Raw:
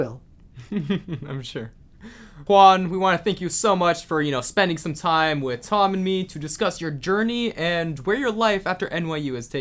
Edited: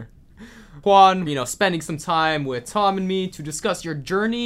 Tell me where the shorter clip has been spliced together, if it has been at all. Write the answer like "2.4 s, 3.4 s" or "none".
1.3 s